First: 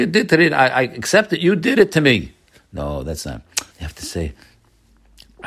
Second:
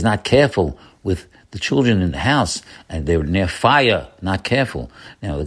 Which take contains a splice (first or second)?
first